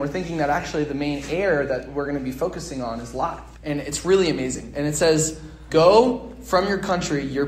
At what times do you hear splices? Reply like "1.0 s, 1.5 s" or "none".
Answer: 3.5 s, 5.7 s